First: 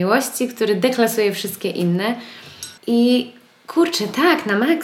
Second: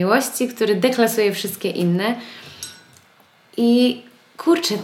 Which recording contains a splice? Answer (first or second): first